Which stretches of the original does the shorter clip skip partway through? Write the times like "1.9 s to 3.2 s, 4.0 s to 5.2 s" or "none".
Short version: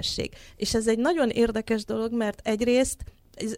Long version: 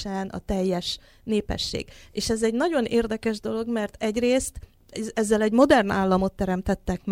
none